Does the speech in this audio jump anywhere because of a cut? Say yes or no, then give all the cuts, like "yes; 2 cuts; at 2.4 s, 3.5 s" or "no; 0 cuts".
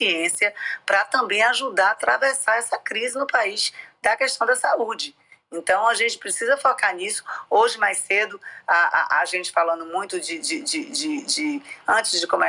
no; 0 cuts